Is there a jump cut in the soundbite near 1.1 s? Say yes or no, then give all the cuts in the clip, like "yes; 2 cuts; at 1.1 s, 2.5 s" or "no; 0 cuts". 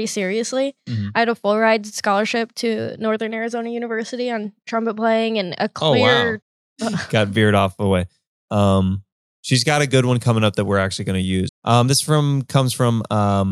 no; 2 cuts; at 6.4 s, 11.5 s